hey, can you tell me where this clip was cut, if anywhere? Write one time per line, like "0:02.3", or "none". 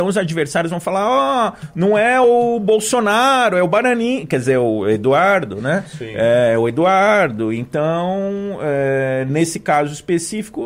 none